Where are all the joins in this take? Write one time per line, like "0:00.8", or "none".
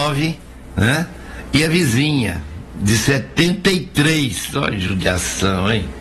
none

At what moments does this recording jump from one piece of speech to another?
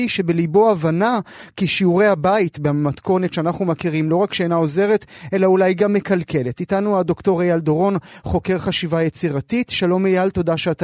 none

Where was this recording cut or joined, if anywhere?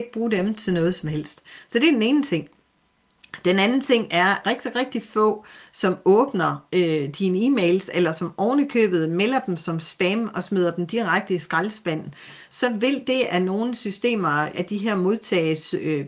0:04.4
0:14.5

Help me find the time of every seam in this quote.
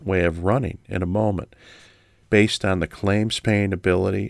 0:02.2

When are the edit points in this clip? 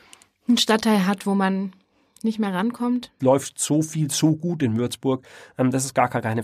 0:03.2

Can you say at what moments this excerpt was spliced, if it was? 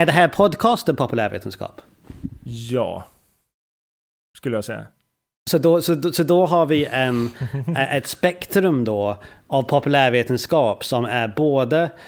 none

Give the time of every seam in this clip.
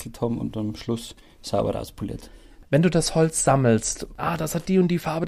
0:04.2

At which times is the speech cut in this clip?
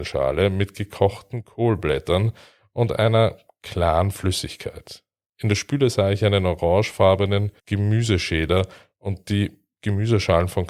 0:05.3
0:07.6

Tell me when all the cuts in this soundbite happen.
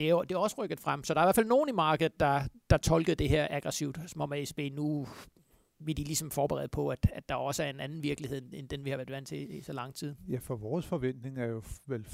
none

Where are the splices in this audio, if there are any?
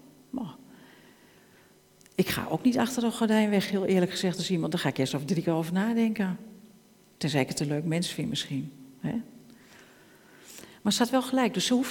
none

